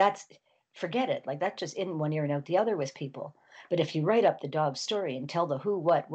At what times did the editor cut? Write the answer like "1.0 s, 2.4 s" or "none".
none